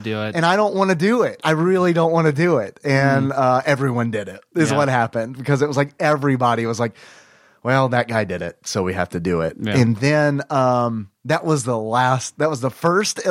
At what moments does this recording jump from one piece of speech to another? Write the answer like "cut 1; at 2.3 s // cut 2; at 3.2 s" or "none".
none